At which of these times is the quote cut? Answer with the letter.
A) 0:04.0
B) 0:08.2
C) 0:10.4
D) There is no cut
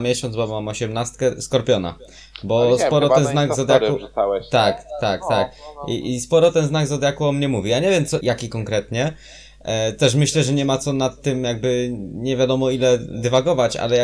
B